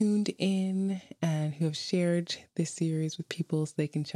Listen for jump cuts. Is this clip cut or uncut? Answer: uncut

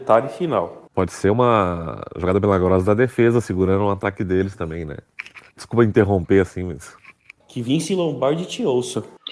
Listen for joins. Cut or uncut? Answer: uncut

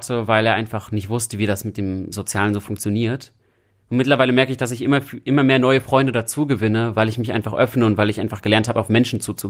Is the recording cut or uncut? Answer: uncut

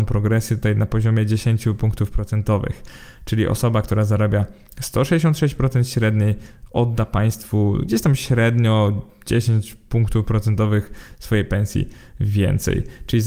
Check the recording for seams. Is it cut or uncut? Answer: uncut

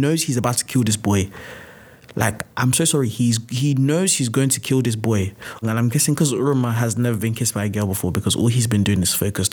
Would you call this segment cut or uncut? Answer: cut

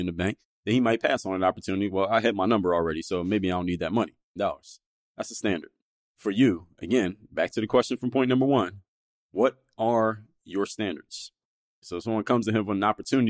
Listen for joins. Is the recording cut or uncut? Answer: cut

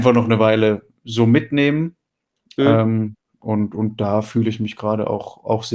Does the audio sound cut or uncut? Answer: uncut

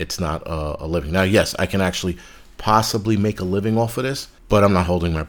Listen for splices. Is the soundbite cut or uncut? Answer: cut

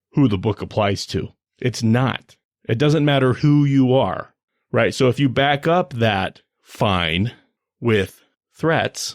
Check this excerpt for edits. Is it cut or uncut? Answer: cut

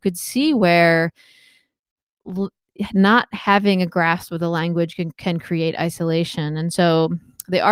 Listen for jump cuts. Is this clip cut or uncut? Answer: uncut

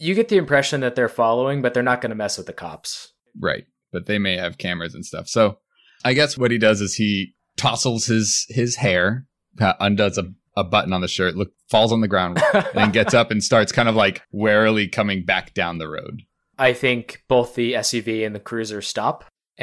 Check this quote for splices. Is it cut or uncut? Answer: cut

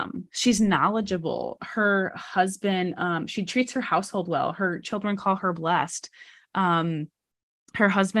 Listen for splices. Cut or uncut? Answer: uncut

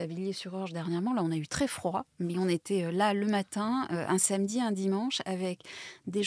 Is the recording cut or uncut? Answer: uncut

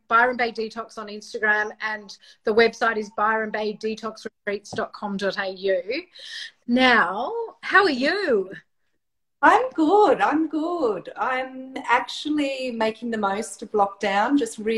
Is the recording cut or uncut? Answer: uncut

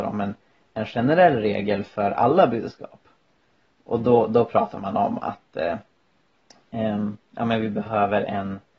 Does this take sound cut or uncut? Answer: uncut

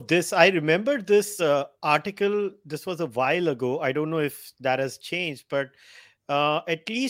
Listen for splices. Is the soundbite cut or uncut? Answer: uncut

